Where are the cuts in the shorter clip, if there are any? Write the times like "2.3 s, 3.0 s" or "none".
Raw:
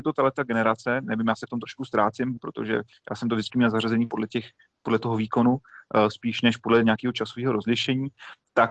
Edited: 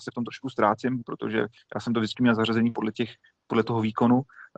none